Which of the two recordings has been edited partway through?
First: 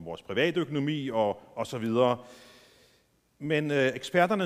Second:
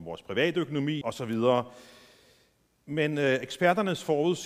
second; 1 cut; at 1.0 s

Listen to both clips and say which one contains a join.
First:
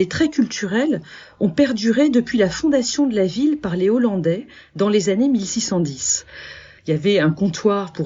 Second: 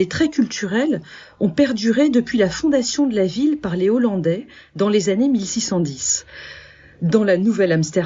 first; 1 cut; at 6.8 s

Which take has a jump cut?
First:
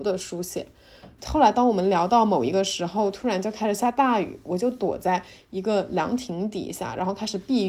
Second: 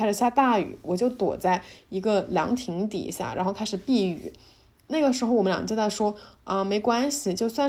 first; 1 cut; at 1.2 s

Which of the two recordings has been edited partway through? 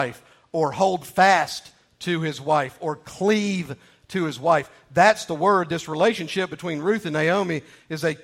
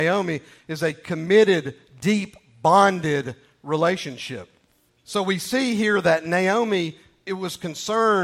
second; 1 cut; at 4.9 s

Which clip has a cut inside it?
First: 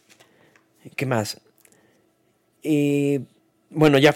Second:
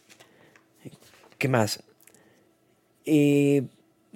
first; 1 cut; at 0.9 s

